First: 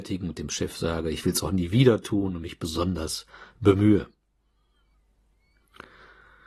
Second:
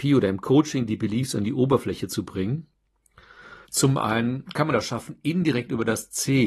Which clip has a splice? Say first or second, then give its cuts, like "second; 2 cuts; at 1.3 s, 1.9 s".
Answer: second; 1 cut; at 3.6 s